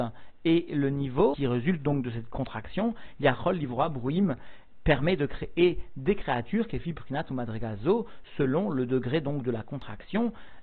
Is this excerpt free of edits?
yes; 0 cuts

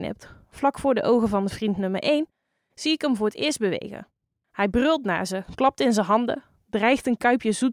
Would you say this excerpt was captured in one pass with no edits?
no; 1 cut; at 4.4 s

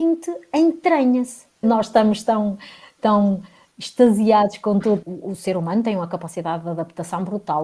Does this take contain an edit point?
yes; 2 cuts; at 1.6 s, 5.0 s

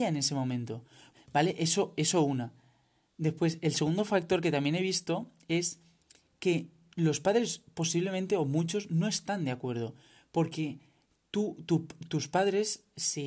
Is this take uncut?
no; 1 cut; at 1.1 s

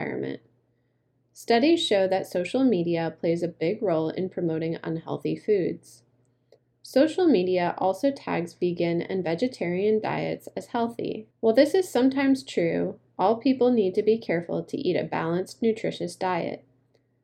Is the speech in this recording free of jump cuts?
no; 1 cut; at 11.3 s

